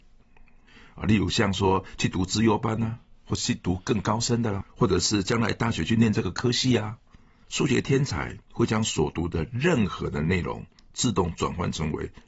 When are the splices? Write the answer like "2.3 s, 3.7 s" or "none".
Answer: 4.6 s, 7.4 s